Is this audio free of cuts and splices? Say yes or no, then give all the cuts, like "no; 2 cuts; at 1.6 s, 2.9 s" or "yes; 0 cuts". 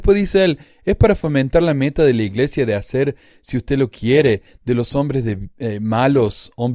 yes; 0 cuts